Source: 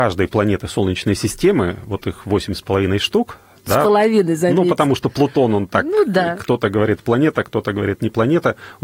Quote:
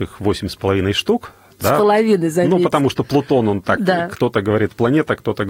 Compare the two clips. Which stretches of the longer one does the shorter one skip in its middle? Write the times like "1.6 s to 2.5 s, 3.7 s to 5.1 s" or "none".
5.8 s to 6.0 s